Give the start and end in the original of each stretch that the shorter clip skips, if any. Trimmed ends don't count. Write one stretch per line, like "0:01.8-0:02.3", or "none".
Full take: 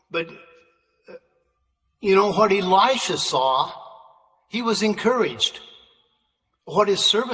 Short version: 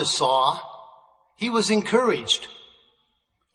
none